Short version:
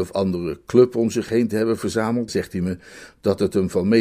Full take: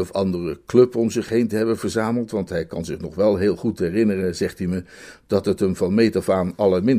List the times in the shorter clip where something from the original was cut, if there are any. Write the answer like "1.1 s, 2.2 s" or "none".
2.3 s